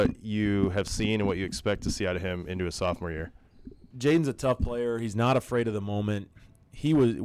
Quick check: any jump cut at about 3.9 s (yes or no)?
yes